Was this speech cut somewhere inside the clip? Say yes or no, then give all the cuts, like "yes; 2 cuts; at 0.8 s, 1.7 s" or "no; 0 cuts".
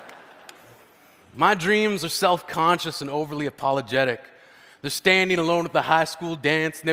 no; 0 cuts